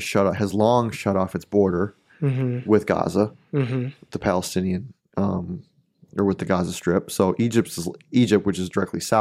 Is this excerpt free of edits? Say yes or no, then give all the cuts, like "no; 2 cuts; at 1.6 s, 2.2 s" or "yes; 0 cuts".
yes; 0 cuts